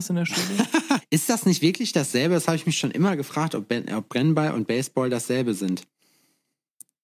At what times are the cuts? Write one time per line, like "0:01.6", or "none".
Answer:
0:01.0